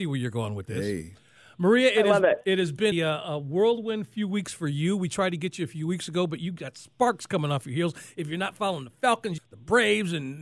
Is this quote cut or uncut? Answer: cut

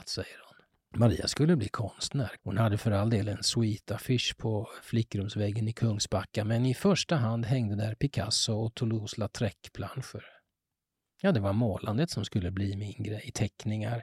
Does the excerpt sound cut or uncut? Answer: cut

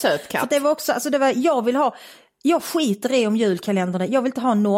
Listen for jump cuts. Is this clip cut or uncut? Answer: uncut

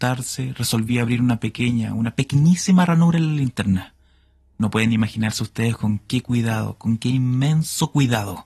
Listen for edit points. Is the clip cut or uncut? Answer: cut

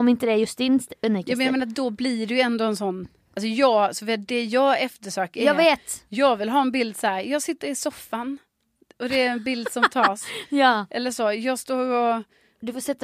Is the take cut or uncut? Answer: uncut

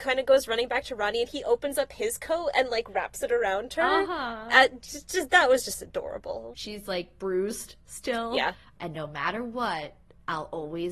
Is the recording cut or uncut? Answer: cut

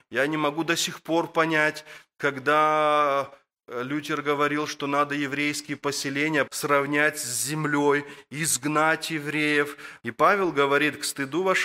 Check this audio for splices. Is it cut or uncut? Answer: cut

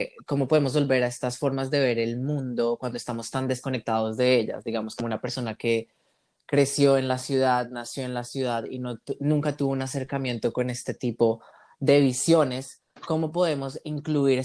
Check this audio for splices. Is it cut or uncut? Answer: uncut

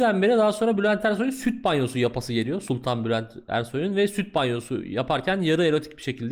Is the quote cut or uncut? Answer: uncut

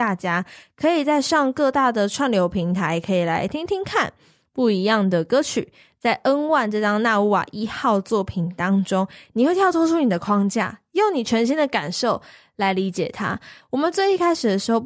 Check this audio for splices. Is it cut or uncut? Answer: uncut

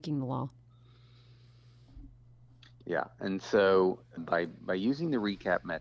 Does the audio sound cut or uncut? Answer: cut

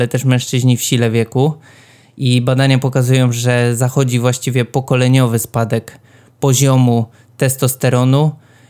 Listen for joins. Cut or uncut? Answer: uncut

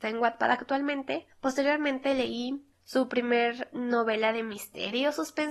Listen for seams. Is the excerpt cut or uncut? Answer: cut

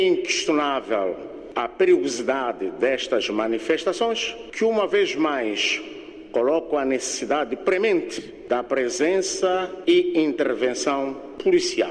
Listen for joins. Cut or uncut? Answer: uncut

